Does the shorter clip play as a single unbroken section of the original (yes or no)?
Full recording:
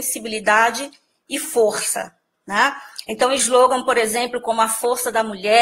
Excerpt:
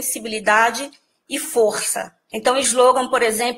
no